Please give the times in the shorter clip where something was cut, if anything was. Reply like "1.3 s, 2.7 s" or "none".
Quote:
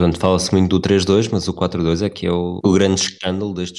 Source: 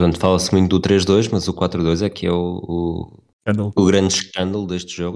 2.6 s